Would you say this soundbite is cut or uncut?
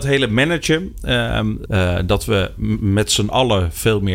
cut